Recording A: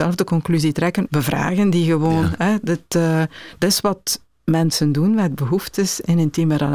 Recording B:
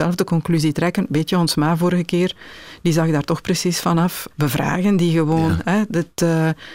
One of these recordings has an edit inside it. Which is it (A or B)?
A